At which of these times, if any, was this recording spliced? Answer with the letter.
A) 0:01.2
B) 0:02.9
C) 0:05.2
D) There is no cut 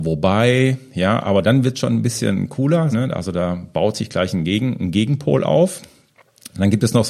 B